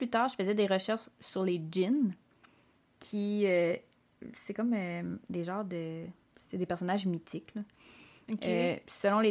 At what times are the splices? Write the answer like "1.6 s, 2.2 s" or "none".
none